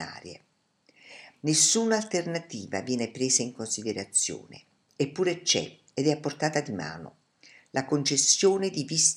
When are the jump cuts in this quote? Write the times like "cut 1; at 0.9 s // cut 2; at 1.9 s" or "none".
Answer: cut 1; at 1.3 s

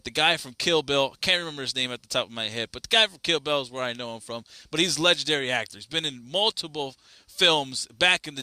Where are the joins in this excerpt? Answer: none

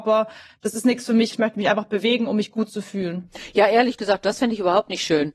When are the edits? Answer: cut 1; at 1.3 s

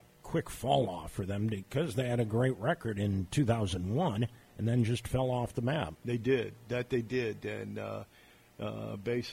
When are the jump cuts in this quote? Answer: none

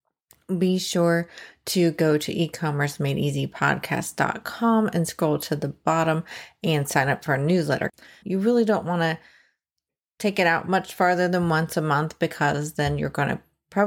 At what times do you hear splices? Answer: cut 1; at 8.2 s

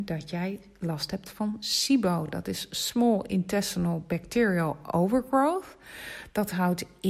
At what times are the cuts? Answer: none

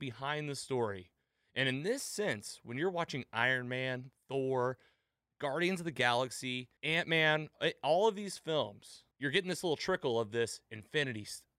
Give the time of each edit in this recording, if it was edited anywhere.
cut 1; at 6.8 s // cut 2; at 9.1 s

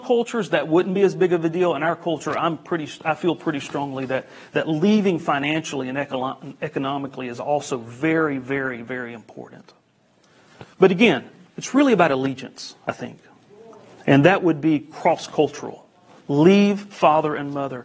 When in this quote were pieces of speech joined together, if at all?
none

